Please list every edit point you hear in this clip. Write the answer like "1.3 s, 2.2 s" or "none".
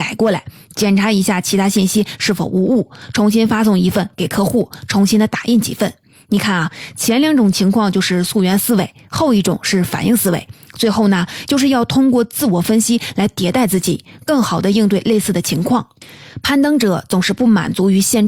11.5 s